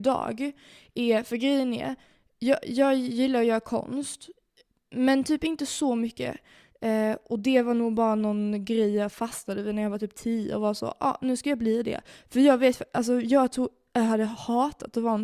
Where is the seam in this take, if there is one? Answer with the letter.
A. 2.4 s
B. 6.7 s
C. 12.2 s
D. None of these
B